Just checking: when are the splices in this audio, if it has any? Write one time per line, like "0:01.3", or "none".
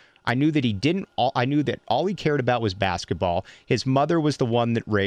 0:03.6